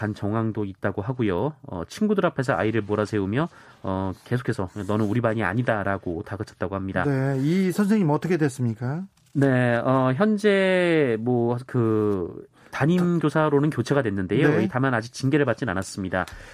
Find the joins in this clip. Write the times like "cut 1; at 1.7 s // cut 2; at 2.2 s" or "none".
none